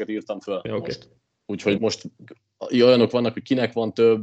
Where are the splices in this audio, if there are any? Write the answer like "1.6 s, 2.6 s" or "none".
1.8 s